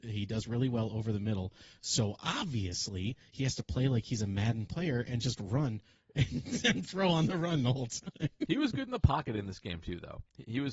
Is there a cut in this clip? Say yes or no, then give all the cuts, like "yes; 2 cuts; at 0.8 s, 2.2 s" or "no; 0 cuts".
no; 0 cuts